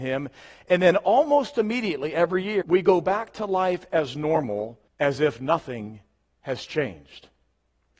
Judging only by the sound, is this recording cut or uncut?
cut